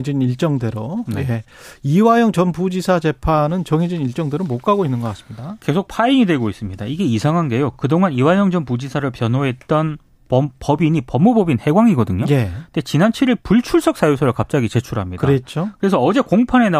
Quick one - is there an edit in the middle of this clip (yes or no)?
no